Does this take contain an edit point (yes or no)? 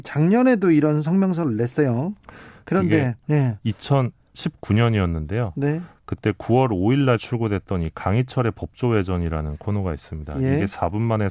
yes